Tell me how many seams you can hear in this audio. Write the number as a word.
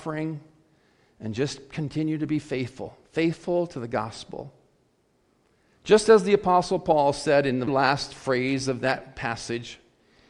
two